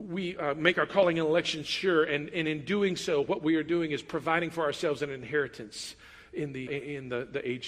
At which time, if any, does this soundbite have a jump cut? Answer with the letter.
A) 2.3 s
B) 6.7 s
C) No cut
B